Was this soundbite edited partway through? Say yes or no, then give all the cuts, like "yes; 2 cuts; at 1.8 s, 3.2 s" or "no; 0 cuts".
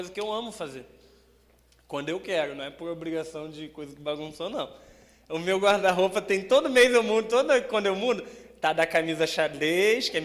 no; 0 cuts